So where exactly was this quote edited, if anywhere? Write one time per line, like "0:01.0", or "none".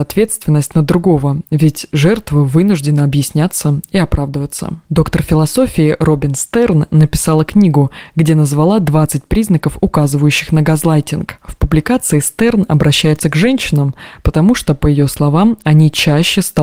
none